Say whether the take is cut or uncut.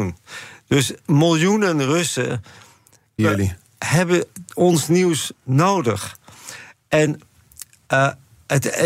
cut